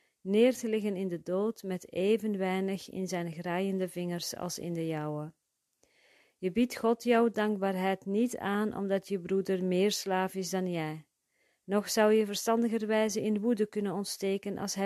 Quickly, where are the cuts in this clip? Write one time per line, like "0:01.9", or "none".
none